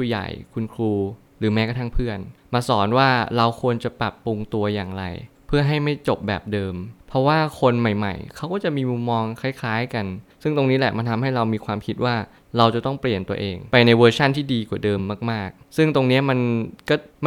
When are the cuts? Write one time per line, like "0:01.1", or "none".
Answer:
none

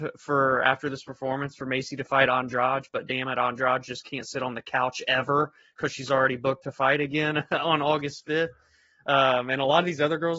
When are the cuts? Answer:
none

